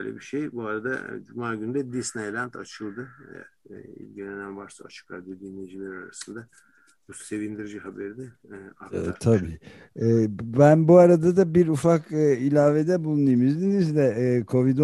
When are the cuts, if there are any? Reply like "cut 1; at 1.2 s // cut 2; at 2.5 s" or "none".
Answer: none